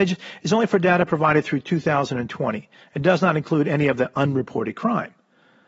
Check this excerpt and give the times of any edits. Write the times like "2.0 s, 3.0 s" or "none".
none